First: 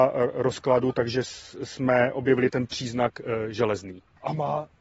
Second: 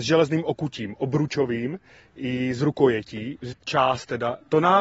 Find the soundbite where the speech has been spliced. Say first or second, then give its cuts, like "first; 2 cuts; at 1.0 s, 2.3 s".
second; 1 cut; at 3.5 s